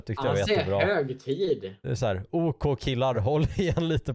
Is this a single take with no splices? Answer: yes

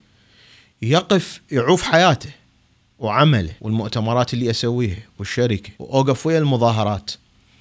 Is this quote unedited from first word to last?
no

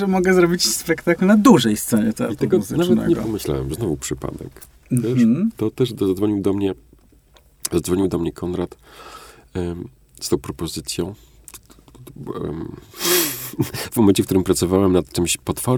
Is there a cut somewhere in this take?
no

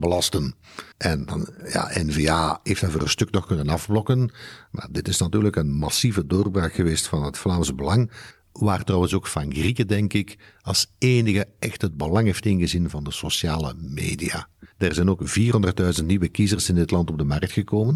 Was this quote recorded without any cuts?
no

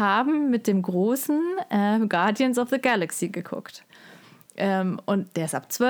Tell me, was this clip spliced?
no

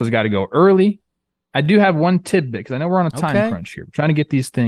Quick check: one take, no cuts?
yes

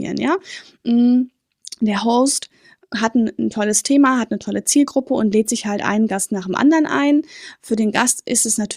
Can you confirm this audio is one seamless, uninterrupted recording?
yes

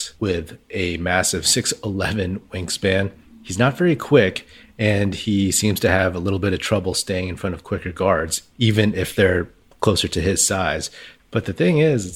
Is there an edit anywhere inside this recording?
yes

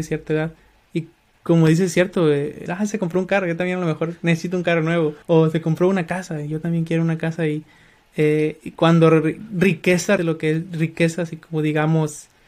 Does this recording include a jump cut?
yes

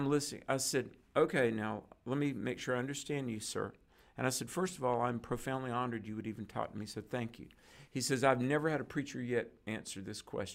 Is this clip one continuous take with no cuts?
yes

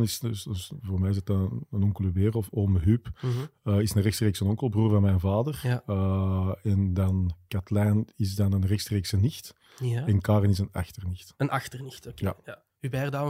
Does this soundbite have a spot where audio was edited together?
no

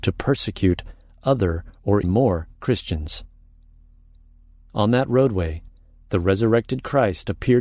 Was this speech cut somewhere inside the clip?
yes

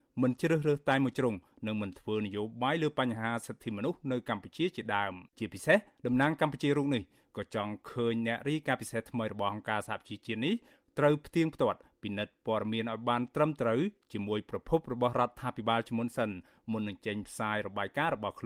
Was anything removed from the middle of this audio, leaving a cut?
yes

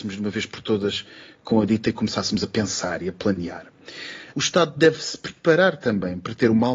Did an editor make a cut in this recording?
yes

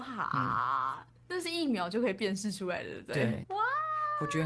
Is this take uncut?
no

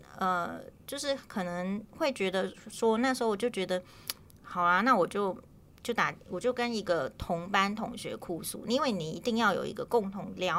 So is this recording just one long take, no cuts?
yes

